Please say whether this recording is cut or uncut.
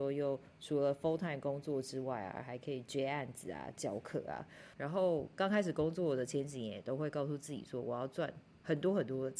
cut